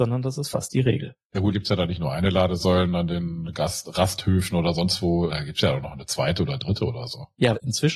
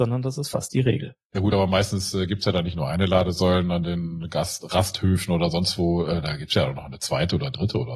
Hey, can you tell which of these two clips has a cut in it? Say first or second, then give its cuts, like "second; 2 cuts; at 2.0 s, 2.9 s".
first; 2 cuts; at 1.5 s, 5.3 s